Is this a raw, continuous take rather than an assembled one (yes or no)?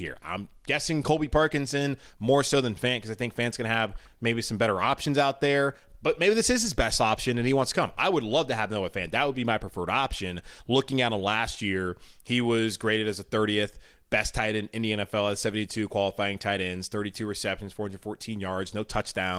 yes